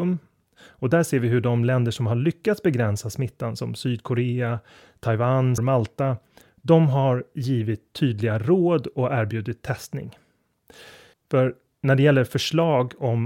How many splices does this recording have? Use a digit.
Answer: 2